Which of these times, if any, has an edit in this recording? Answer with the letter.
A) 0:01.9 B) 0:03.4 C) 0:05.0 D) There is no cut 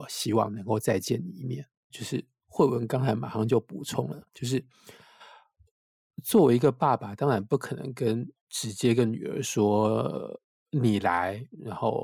A